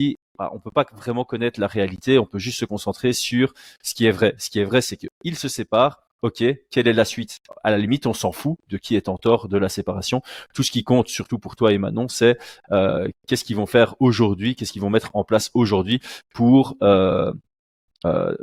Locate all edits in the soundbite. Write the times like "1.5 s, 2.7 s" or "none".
none